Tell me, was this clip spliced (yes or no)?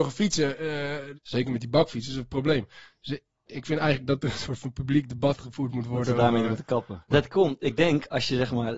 yes